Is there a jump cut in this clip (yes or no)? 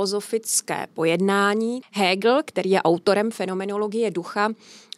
yes